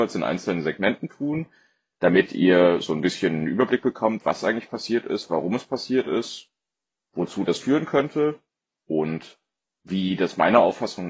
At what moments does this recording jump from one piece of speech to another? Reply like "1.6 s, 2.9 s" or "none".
none